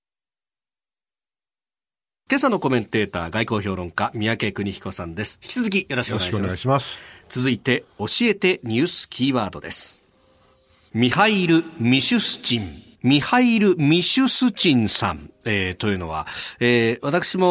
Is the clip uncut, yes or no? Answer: no